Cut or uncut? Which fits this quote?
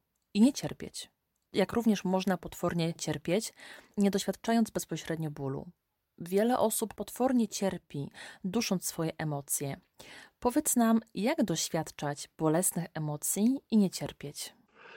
uncut